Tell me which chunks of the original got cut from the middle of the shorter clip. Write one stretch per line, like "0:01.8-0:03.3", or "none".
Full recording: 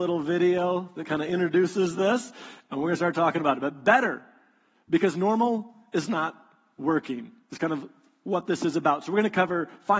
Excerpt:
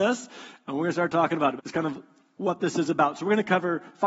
0:03.6-0:07.4